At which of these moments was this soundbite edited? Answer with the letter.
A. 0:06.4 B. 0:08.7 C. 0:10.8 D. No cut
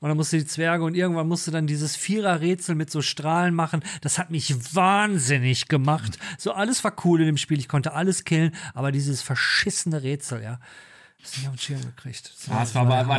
D